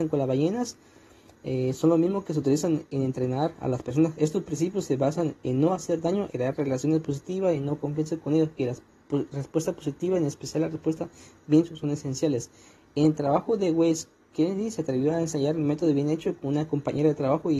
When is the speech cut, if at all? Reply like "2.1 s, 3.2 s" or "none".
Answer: 6.3 s